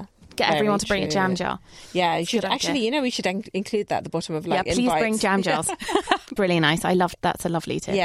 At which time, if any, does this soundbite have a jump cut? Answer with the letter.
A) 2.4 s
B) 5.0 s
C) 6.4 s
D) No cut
C